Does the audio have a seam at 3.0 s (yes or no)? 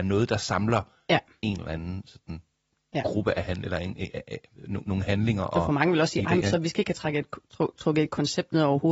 no